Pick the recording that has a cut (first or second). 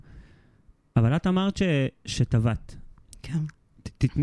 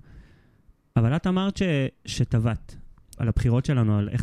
second